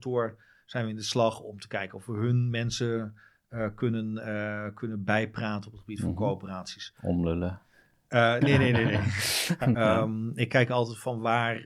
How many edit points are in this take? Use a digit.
2